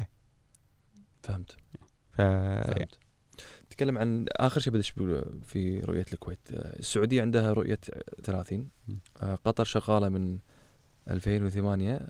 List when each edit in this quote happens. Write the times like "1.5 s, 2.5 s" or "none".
3.6 s, 8.2 s